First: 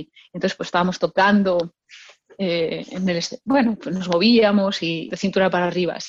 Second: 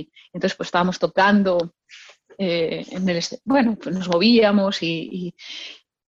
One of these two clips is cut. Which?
first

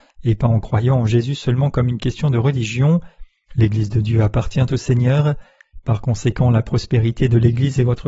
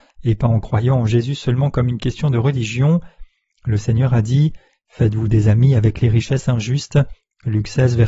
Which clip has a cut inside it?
first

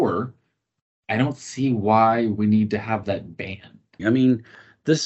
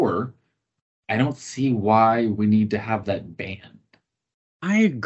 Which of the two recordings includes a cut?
first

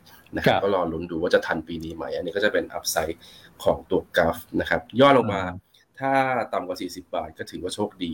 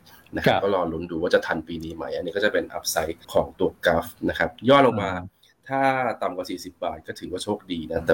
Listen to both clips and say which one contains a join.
second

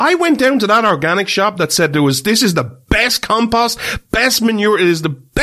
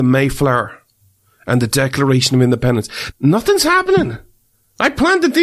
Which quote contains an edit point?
second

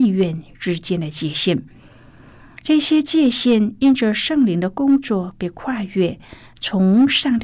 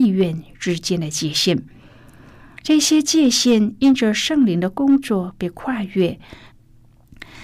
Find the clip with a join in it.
second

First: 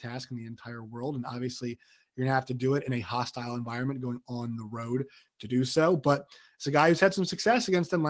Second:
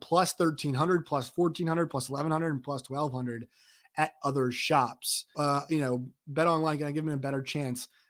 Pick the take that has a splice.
second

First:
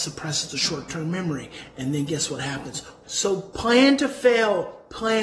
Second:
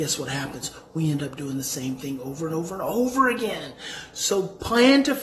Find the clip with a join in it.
first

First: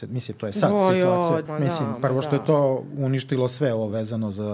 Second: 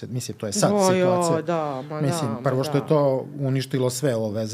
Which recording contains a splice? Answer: first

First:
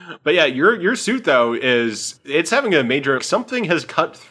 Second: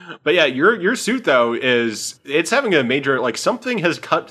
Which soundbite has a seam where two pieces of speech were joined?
first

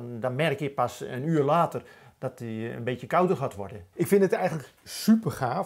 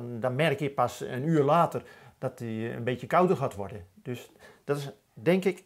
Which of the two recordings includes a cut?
first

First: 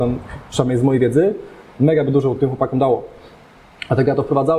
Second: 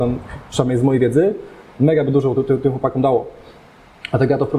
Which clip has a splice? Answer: first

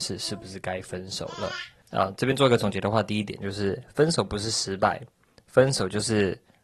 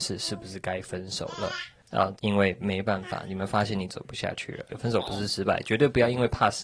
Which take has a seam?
second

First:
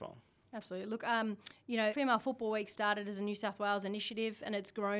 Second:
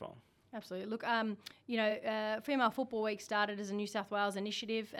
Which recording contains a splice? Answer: first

